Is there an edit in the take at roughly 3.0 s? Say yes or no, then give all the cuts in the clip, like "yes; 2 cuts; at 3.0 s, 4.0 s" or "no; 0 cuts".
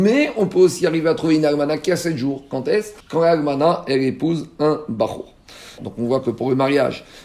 yes; 2 cuts; at 3.0 s, 5.8 s